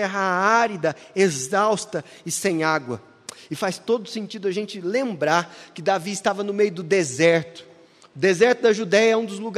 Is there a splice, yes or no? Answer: no